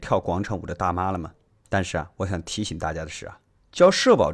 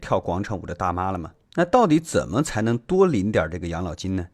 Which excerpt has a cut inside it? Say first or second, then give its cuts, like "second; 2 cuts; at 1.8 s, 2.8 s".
second; 1 cut; at 1.4 s